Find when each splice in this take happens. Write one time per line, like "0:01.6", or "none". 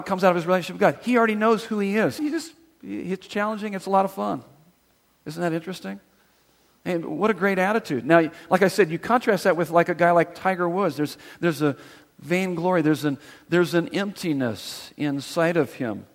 0:02.2